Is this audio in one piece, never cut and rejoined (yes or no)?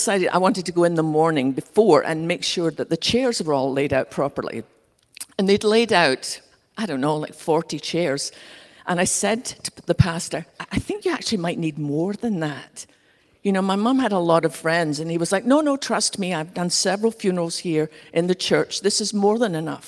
yes